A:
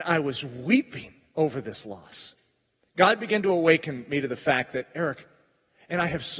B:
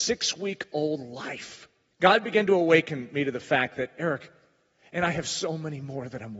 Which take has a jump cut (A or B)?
B